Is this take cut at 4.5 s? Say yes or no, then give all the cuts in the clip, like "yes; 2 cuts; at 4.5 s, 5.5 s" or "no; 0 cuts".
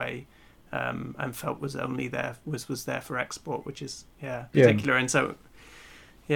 yes; 1 cut; at 4.5 s